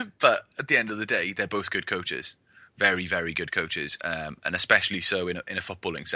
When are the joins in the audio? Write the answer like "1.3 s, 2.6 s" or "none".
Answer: none